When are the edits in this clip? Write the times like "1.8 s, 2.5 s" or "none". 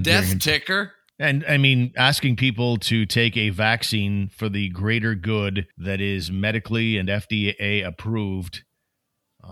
1.1 s, 5.7 s